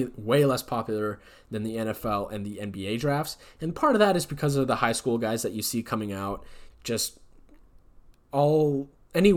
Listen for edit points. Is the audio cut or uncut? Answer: cut